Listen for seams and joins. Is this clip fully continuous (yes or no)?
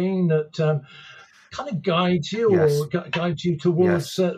yes